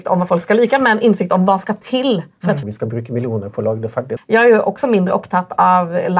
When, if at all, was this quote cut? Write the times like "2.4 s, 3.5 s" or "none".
2.6 s, 4.2 s